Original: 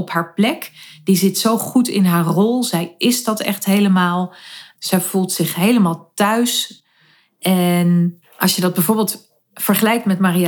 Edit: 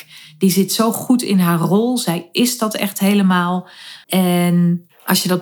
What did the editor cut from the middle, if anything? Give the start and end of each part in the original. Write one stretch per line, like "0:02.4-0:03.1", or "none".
0:04.7-0:07.4